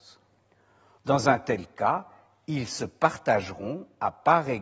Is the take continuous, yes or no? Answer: no